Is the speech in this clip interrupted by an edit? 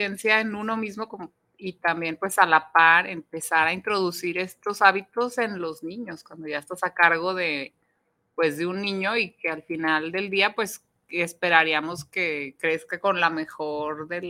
no; 0 cuts

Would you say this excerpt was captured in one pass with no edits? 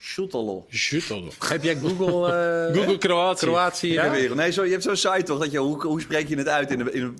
no; 1 cut; at 4.0 s

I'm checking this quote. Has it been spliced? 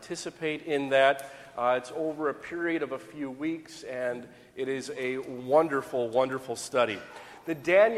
no; 0 cuts

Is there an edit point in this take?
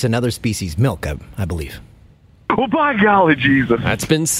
no; 0 cuts

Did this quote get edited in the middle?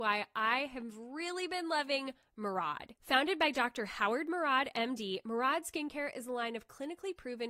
no; 0 cuts

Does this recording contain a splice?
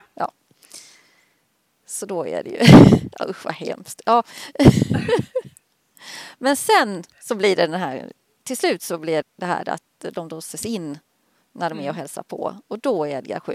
yes; 1 cut; at 9.2 s

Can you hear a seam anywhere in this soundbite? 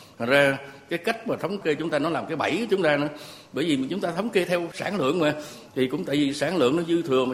yes; 1 cut; at 5.7 s

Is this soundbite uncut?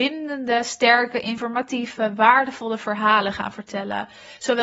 yes; 0 cuts

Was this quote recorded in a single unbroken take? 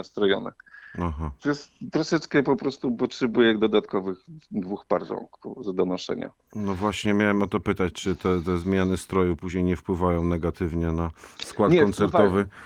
yes; 0 cuts

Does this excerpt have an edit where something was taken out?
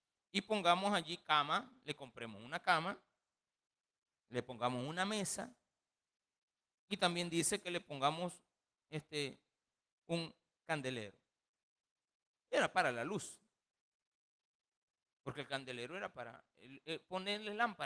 no; 0 cuts

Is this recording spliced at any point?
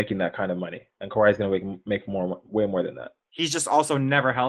yes; 1 cut; at 3.2 s

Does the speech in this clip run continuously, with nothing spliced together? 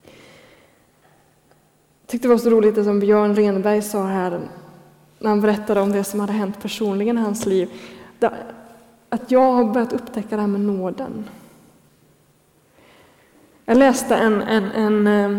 yes; 0 cuts

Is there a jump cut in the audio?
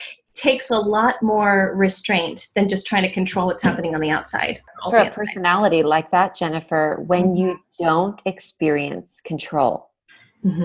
no; 0 cuts

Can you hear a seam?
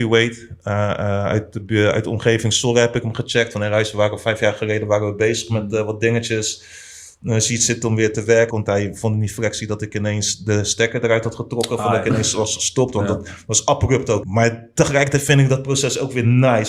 yes; 2 cuts; at 8.5 s, 14.2 s

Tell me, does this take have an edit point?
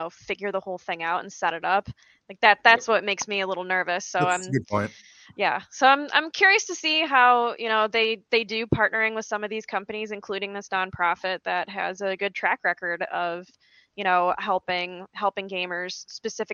no; 0 cuts

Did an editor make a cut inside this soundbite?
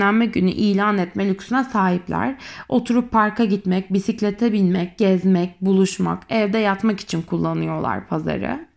no; 0 cuts

